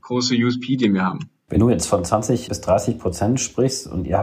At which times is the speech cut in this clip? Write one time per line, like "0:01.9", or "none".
none